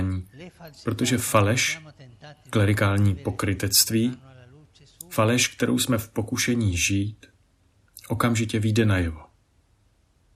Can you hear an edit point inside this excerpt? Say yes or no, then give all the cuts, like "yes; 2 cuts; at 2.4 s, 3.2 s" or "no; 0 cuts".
no; 0 cuts